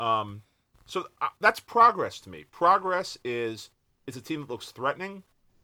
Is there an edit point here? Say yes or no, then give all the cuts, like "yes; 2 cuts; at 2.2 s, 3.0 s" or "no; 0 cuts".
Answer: no; 0 cuts